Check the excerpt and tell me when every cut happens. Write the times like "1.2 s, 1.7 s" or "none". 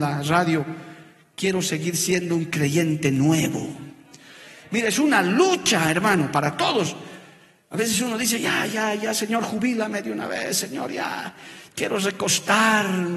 none